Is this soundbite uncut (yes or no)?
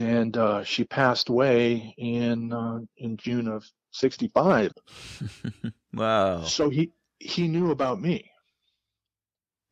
no